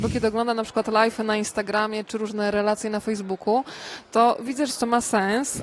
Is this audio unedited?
no; 2 cuts; at 2.0 s, 4.7 s

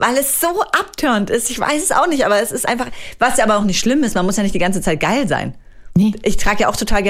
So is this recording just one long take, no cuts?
yes; 0 cuts

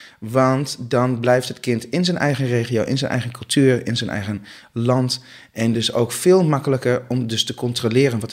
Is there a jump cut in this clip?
no; 0 cuts

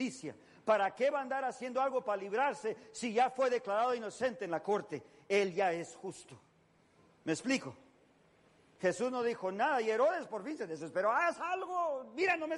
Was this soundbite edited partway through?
no; 0 cuts

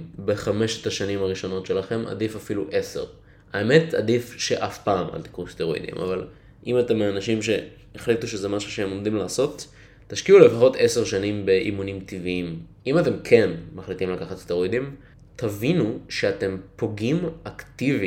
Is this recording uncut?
no; 1 cut; at 12.8 s

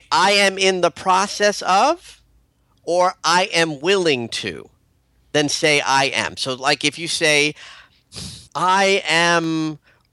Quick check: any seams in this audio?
yes; 1 cut; at 8.5 s

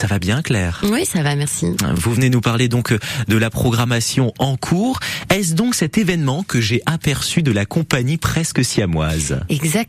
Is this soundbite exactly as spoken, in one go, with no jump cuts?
yes; 0 cuts

